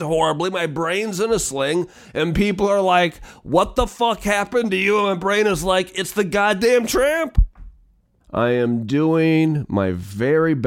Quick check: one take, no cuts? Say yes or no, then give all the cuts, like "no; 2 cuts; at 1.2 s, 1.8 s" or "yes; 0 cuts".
no; 1 cut; at 8.2 s